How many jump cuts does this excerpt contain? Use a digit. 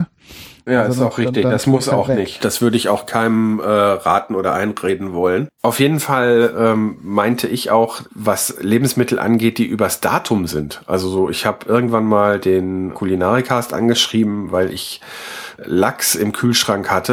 2